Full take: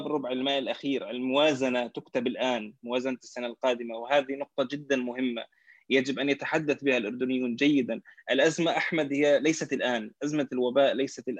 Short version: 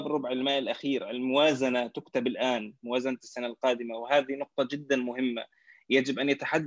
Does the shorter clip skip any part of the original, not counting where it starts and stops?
no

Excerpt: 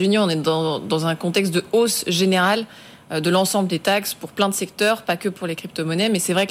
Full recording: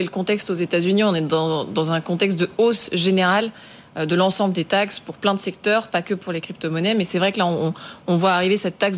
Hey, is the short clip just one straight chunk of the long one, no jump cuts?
yes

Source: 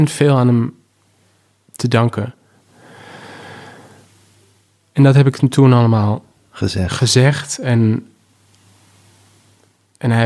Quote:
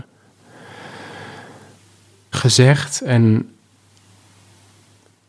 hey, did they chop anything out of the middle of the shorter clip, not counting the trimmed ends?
yes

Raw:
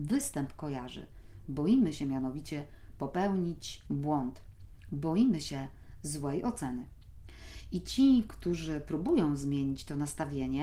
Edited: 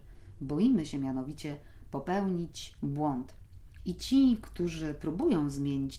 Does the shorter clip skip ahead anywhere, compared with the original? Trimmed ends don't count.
yes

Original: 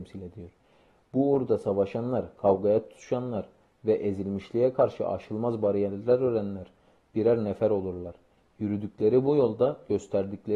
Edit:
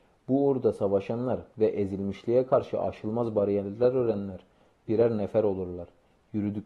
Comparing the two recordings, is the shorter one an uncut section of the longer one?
no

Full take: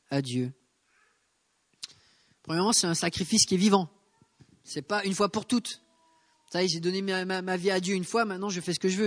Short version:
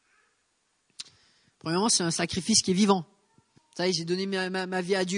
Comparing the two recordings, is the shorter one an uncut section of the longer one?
no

